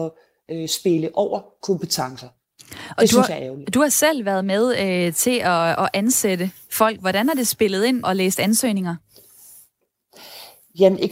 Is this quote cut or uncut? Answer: cut